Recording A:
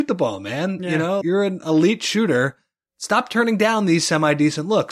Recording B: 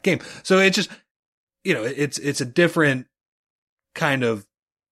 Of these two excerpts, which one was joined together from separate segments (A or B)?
A